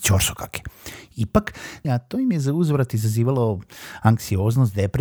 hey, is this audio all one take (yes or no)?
no